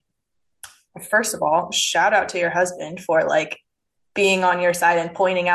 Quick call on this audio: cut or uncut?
uncut